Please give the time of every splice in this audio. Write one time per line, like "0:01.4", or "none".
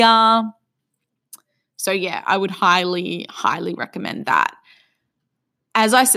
none

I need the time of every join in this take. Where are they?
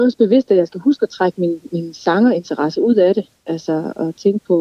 none

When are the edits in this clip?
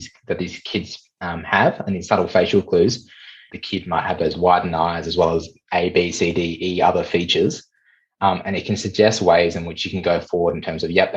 0:03.5

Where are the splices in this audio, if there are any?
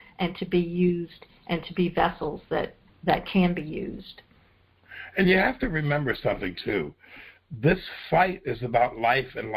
0:02.9

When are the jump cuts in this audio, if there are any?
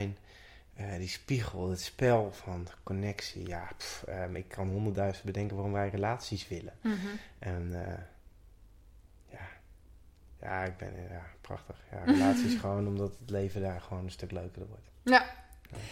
none

